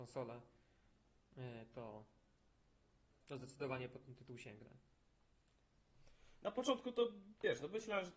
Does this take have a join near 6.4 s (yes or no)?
yes